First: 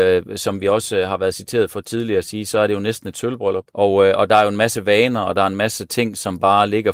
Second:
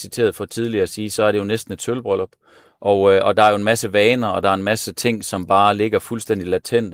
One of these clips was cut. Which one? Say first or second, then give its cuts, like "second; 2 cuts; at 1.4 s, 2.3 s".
first; 1 cut; at 3.7 s